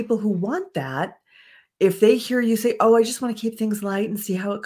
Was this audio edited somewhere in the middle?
no; 0 cuts

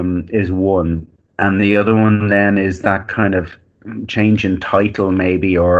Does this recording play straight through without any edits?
yes; 0 cuts

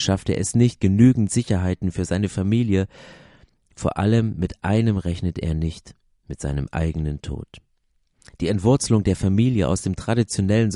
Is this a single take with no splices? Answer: yes; 0 cuts

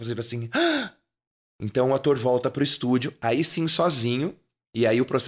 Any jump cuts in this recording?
no; 0 cuts

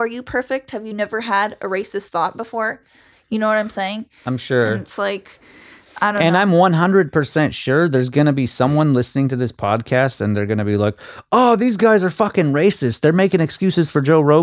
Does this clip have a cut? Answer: no; 0 cuts

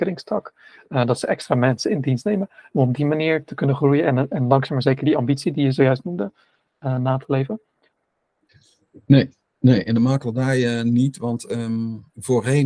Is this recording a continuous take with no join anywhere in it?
yes; 0 cuts

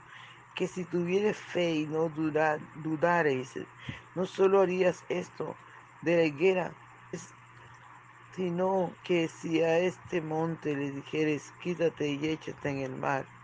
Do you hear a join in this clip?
yes; 2 cuts; at 7.1 s, 9.0 s

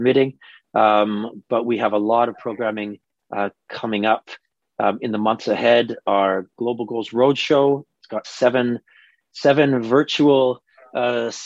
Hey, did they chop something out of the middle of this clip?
no; 0 cuts

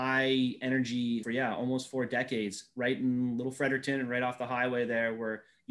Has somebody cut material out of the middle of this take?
yes; 1 cut; at 1.2 s

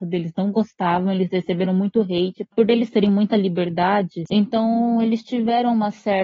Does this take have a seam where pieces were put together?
yes; 1 cut; at 4.3 s

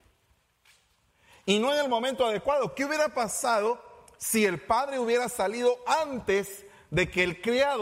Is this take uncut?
yes; 0 cuts

